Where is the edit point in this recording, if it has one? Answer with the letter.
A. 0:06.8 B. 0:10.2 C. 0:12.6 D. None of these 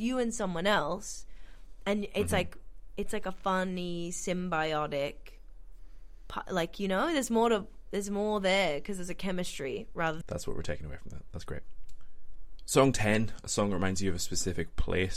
B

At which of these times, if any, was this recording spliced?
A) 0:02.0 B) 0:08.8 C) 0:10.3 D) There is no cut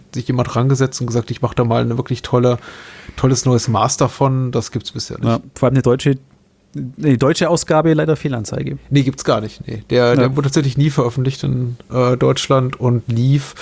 D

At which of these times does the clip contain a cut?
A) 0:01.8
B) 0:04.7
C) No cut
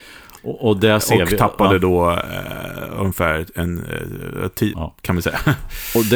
B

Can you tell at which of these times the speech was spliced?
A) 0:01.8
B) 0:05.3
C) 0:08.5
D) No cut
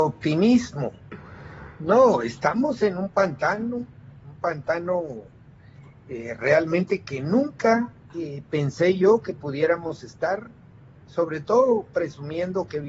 D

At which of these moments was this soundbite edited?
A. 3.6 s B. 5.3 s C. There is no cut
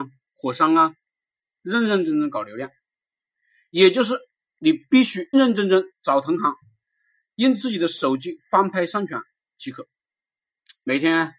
B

